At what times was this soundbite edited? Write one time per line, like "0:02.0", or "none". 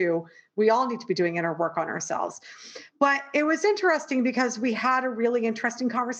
none

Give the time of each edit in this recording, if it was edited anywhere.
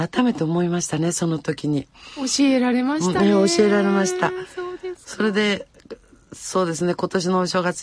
none

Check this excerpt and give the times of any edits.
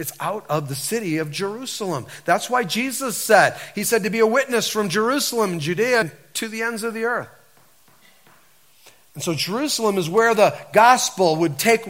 0:06.0

